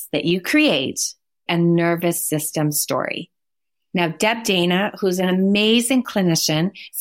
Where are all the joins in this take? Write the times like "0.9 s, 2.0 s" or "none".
1.5 s, 3.9 s